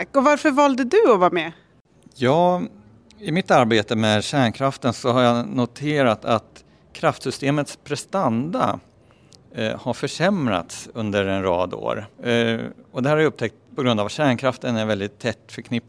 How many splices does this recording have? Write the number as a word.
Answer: two